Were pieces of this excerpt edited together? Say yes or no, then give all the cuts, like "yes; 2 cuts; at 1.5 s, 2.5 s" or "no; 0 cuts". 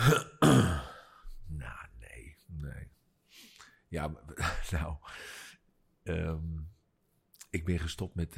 no; 0 cuts